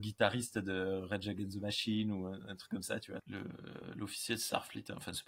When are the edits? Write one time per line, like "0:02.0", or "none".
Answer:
0:03.2